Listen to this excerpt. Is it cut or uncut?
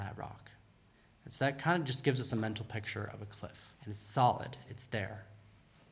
cut